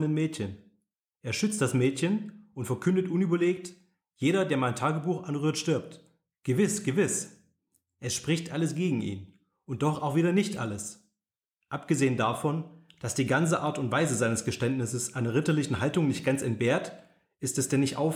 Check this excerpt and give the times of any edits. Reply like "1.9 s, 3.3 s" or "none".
none